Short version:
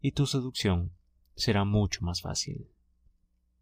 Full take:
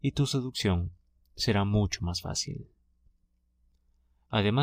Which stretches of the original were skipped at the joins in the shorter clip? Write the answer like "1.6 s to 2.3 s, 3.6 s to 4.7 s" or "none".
none